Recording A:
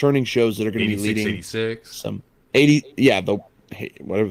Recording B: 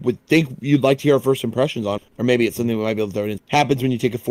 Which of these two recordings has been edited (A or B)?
B